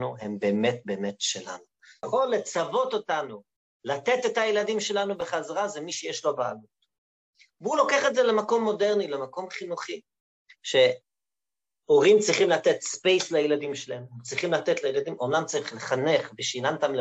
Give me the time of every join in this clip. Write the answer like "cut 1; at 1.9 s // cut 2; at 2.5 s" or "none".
cut 1; at 2.0 s